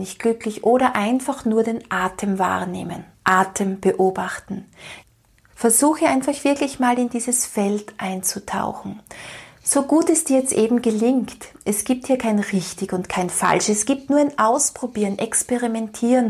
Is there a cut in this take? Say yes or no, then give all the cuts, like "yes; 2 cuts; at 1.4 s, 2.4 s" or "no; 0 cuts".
yes; 1 cut; at 3.1 s